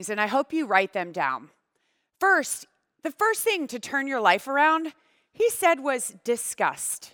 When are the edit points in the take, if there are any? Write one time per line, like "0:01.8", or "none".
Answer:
none